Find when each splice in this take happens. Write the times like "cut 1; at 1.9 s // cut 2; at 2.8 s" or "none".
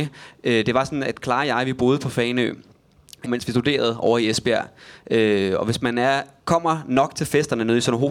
cut 1; at 3.2 s